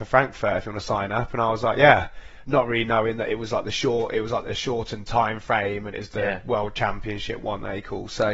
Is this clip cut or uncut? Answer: uncut